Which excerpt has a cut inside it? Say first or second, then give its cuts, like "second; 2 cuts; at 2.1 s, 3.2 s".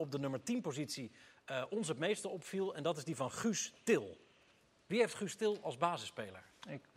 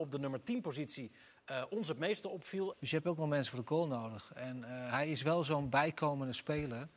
second; 1 cut; at 2.7 s